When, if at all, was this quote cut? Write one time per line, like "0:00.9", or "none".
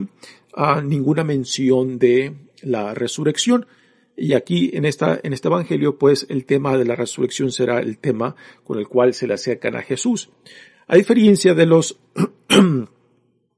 none